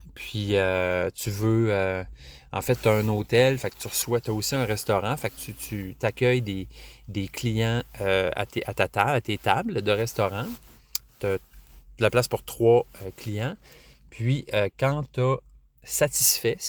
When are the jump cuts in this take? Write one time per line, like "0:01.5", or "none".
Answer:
none